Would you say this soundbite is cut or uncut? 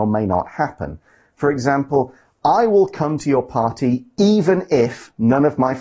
uncut